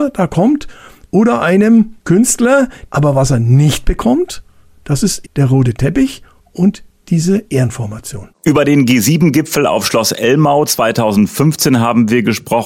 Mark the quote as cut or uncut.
cut